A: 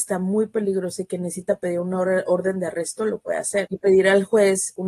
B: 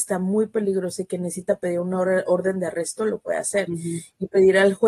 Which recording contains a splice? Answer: A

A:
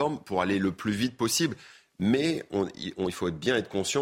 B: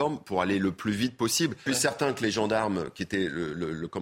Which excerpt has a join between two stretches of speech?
B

